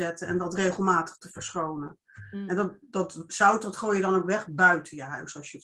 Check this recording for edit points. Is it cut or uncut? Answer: uncut